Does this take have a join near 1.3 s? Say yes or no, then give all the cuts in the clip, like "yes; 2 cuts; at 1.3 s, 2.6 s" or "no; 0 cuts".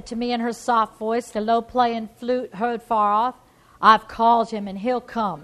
yes; 1 cut; at 1.3 s